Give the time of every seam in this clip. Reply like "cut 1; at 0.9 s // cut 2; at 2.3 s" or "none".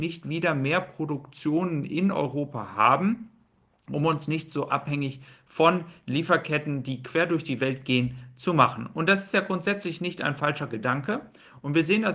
none